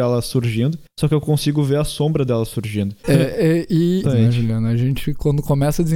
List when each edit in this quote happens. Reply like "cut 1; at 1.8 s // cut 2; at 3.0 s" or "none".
cut 1; at 3.0 s // cut 2; at 4.0 s